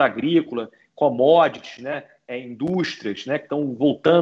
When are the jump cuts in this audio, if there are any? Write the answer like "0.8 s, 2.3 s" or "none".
none